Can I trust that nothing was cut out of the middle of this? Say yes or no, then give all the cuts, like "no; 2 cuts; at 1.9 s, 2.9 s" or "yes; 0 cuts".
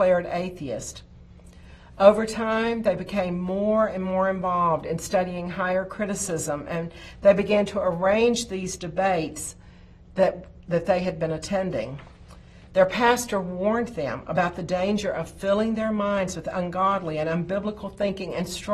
yes; 0 cuts